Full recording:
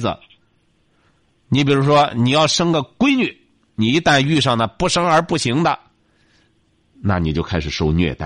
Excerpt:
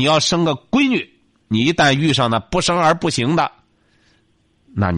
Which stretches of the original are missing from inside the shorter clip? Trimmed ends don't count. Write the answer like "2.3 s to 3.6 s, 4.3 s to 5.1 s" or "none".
none